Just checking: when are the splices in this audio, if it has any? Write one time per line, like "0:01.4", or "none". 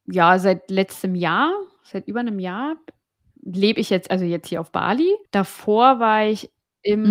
0:05.3